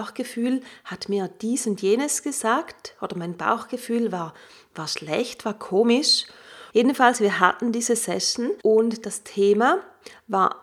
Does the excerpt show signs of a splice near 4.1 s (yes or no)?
no